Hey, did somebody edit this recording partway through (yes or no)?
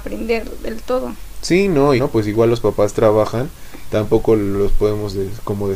yes